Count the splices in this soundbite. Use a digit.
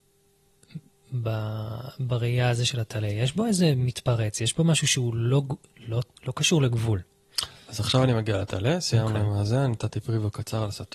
0